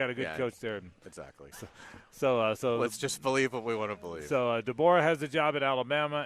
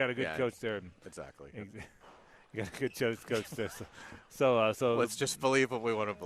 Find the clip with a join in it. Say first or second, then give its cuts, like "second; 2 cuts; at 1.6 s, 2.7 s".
first; 1 cut; at 1.5 s